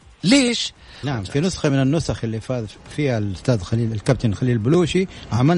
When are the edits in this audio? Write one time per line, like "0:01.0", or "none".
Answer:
0:01.0